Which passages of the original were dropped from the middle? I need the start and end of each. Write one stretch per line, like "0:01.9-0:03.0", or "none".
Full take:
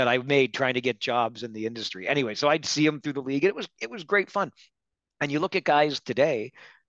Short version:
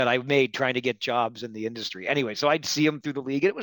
none